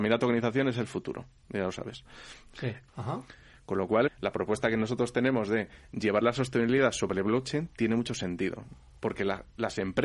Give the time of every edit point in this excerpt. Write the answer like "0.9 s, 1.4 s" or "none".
2.9 s, 4.1 s